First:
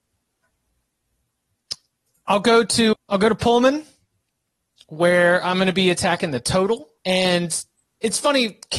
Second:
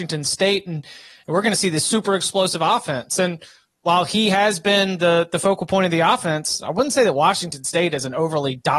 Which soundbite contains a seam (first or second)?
first